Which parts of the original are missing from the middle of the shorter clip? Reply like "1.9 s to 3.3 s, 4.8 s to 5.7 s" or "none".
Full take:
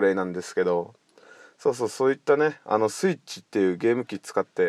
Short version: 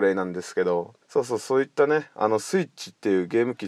1.0 s to 1.5 s